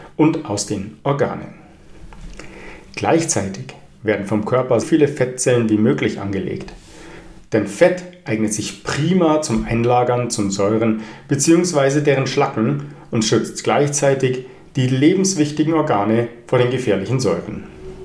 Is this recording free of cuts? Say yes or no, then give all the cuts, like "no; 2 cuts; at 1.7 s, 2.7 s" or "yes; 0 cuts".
no; 1 cut; at 4.8 s